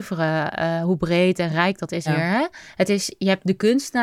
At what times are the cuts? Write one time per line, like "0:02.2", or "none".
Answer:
0:02.1